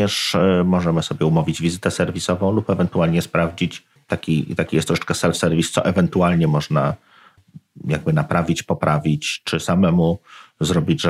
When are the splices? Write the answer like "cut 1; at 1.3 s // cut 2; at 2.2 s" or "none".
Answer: none